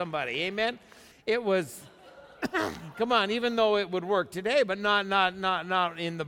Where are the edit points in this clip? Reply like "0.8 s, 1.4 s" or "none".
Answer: 1.1 s